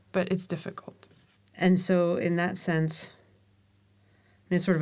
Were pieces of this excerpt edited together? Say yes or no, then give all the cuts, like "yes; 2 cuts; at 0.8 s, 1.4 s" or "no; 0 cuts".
yes; 1 cut; at 1.4 s